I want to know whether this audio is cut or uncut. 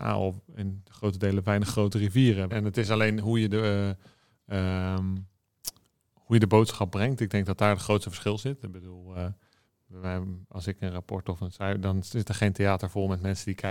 cut